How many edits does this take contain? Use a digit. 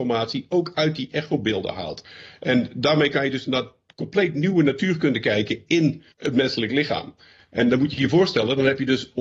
2